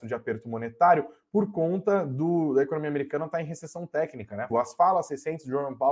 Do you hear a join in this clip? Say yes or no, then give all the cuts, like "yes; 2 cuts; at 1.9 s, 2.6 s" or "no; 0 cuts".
yes; 1 cut; at 4.5 s